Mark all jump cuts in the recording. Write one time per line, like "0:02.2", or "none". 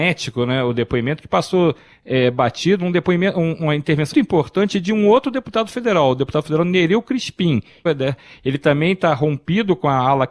0:04.1
0:07.9